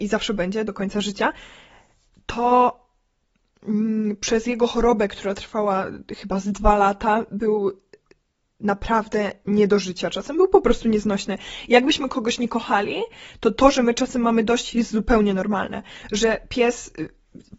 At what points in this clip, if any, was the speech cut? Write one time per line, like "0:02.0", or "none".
none